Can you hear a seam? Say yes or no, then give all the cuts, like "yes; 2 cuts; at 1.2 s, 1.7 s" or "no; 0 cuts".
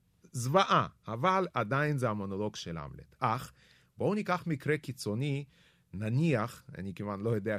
no; 0 cuts